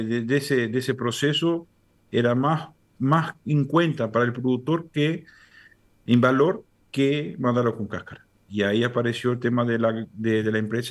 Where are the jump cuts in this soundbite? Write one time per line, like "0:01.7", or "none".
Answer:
0:02.9
0:08.5

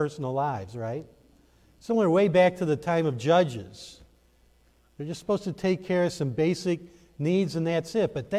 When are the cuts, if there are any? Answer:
none

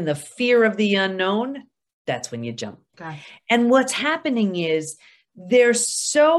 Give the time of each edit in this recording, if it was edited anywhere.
0:02.9

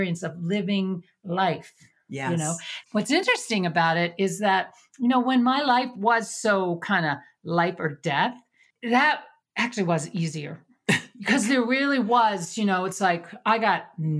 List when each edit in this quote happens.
none

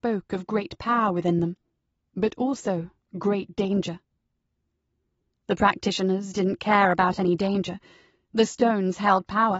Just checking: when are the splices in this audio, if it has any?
none

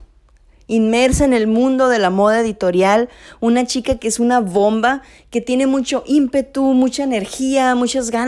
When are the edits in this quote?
none

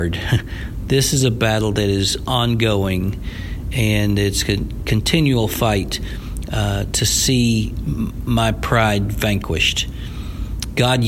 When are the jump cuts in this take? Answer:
none

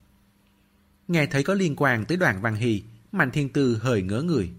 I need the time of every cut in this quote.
none

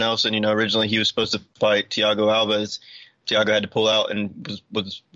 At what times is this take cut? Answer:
0:03.2

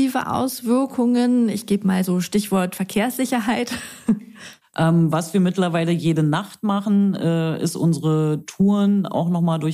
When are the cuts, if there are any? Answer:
none

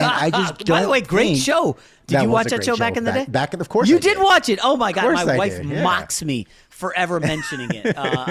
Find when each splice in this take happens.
none

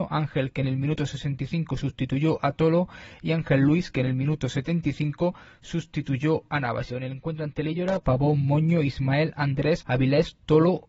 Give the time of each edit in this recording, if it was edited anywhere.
0:06.9
0:08.0
0:09.8

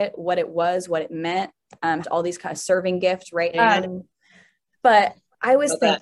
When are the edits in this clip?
0:02.0
0:03.5

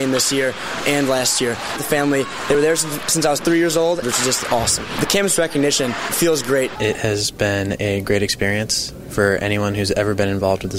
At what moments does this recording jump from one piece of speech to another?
0:01.8
0:04.0
0:06.8

